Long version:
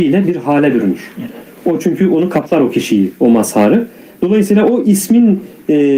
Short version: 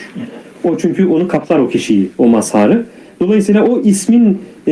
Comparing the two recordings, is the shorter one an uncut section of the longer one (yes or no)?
yes